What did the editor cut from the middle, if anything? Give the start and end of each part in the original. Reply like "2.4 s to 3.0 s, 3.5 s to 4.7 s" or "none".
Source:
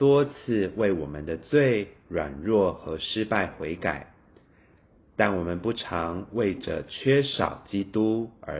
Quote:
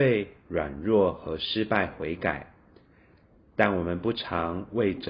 none